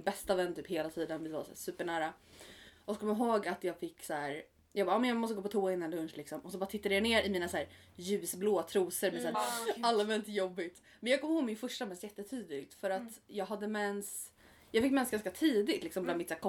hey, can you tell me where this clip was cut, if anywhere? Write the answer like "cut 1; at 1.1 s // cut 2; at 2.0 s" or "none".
cut 1; at 9.3 s